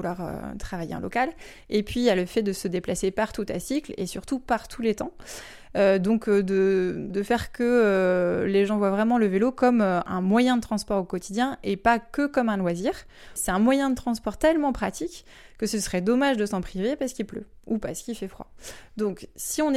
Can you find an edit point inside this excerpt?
no; 0 cuts

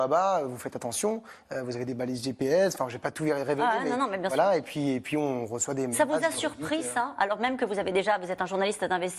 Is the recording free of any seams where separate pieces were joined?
yes; 0 cuts

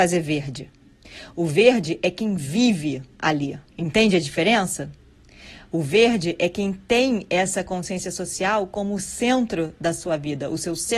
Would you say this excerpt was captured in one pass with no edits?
no; 1 cut; at 3.7 s

